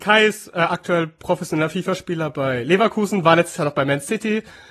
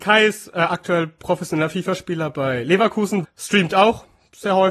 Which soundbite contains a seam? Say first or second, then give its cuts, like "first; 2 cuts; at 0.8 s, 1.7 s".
second; 1 cut; at 3.2 s